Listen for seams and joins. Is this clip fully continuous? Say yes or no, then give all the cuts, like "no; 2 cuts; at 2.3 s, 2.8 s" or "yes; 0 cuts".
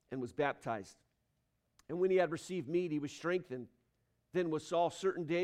yes; 0 cuts